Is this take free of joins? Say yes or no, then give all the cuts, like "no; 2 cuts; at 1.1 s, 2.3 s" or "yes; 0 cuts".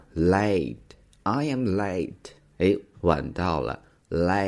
no; 1 cut; at 2.9 s